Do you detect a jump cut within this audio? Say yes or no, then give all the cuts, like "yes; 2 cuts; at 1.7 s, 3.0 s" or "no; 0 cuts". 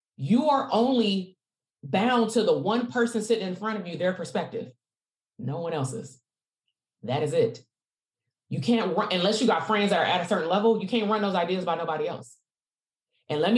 no; 0 cuts